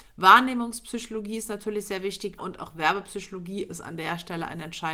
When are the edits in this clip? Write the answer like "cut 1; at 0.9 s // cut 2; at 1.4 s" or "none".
cut 1; at 2.4 s // cut 2; at 3.7 s